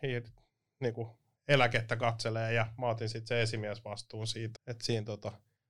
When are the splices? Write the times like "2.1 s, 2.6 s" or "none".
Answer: 4.6 s